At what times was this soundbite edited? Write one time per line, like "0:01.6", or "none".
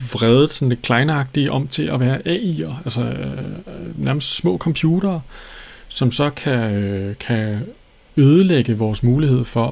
none